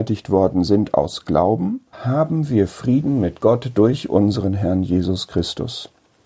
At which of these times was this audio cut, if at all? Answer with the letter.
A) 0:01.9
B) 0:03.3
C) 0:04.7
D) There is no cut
A